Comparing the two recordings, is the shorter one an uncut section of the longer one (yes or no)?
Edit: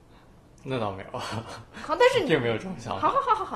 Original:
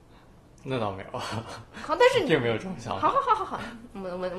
yes